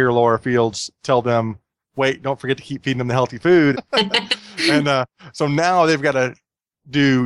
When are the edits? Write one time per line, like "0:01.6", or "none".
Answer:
0:03.7